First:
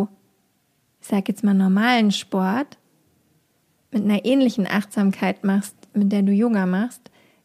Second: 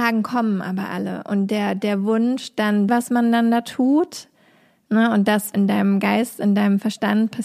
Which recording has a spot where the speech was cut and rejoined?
second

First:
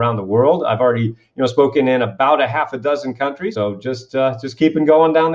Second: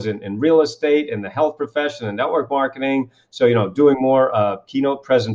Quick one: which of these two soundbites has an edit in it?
first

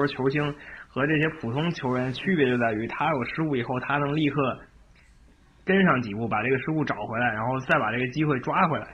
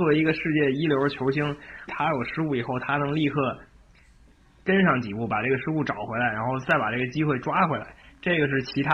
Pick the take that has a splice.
second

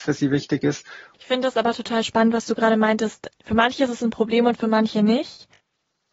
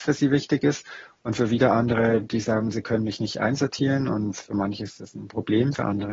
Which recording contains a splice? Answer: first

